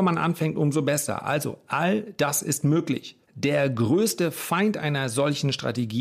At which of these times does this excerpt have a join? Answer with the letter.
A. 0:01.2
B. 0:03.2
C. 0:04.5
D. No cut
B